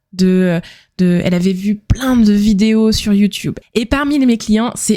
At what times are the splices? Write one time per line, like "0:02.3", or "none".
0:03.6